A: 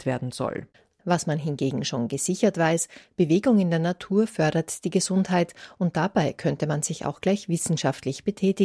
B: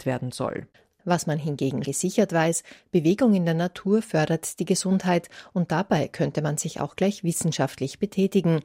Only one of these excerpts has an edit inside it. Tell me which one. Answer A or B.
B